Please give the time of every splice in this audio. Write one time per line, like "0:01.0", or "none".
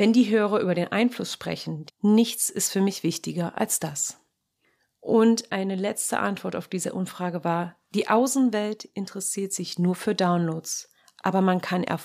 0:01.9